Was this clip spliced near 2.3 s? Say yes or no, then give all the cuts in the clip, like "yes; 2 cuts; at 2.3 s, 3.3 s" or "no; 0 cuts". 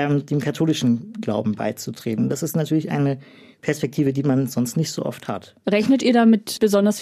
no; 1 cut; at 5.6 s